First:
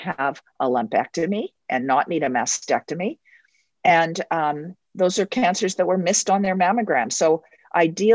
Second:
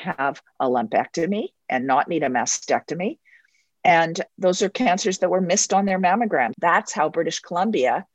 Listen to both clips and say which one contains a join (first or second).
second